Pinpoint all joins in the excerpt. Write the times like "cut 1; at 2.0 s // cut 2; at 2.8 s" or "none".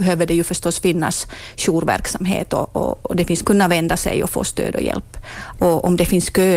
cut 1; at 3.4 s // cut 2; at 5.5 s